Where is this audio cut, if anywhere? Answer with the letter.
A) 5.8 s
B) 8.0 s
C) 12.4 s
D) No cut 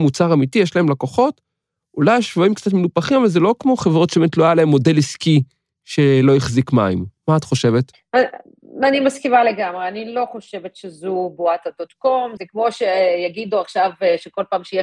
C